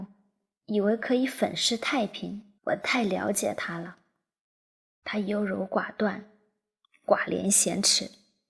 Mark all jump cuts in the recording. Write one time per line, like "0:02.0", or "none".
0:02.6